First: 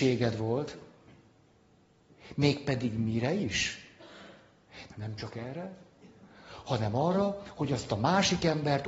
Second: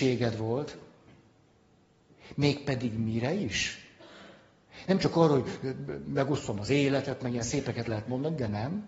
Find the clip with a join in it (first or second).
first